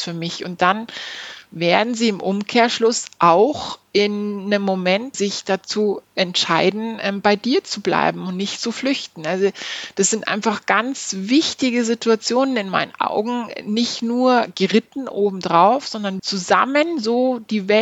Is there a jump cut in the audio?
yes; 2 cuts; at 5.1 s, 16.2 s

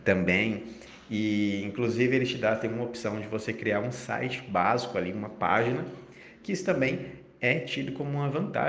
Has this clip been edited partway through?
no; 0 cuts

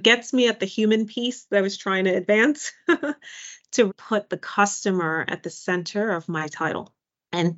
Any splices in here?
yes; 1 cut; at 3.9 s

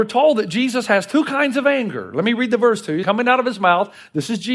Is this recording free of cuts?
no; 1 cut; at 3.0 s

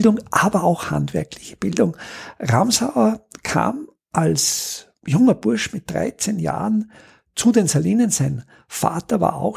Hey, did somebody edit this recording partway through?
no; 0 cuts

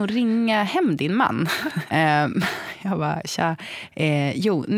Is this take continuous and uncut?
no; 1 cut; at 1.9 s

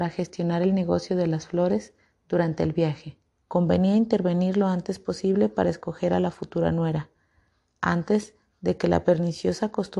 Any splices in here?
yes; 1 cut; at 3.4 s

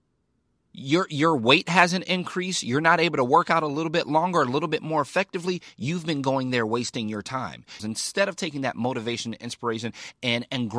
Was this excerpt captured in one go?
no; 1 cut; at 7.8 s

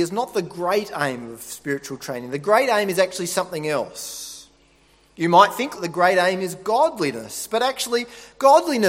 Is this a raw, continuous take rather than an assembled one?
no; 1 cut; at 5.8 s

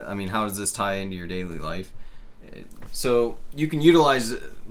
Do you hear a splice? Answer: yes; 1 cut; at 2.9 s

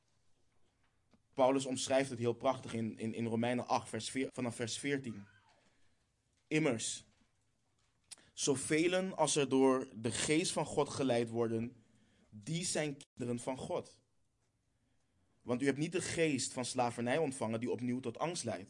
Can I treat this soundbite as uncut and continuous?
no; 1 cut; at 4.3 s

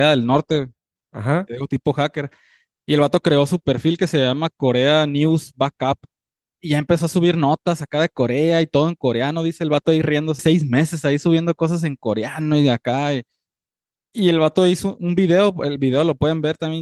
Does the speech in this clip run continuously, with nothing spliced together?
no; 2 cuts; at 6.5 s, 10.4 s

